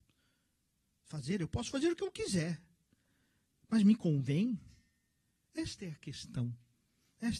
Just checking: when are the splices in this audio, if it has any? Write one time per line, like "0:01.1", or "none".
none